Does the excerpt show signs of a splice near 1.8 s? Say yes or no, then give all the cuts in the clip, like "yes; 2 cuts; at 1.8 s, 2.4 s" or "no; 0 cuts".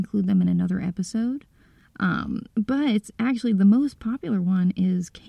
yes; 1 cut; at 1.8 s